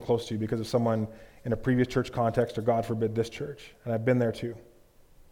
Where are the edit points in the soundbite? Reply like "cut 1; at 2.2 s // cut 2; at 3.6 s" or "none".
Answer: none